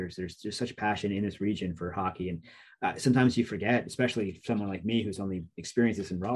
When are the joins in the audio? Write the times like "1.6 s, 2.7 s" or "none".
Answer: none